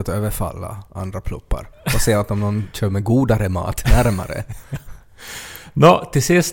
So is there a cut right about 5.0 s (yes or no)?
no